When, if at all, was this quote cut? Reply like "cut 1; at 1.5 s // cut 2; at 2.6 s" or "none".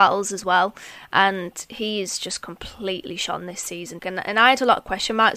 cut 1; at 4.0 s